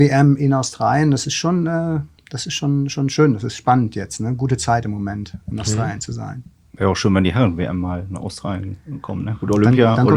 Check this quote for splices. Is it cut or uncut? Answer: uncut